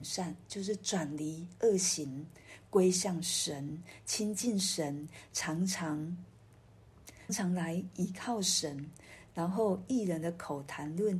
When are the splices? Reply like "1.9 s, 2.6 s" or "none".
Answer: 7.3 s